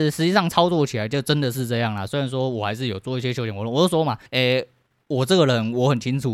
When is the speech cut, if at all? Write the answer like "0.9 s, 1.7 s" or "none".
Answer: 2.1 s, 4.3 s